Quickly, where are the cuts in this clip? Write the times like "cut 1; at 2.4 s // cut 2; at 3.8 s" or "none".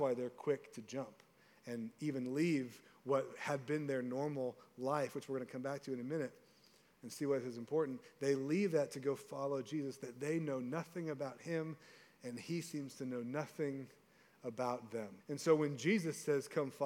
cut 1; at 15.2 s